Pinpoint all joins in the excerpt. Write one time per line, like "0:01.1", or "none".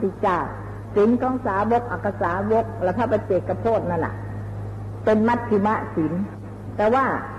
none